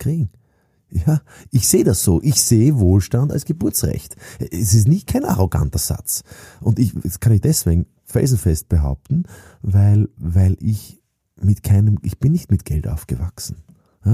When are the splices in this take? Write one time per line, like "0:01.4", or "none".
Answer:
none